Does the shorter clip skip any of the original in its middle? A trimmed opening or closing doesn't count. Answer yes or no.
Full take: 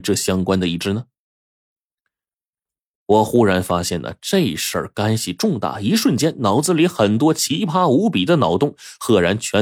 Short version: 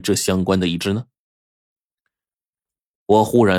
no